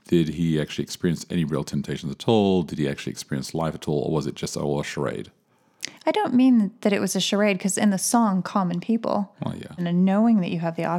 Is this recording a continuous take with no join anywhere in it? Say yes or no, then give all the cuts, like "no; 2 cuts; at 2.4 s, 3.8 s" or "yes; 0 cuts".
no; 1 cut; at 9.8 s